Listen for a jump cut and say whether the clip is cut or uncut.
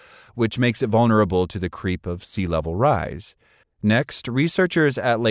cut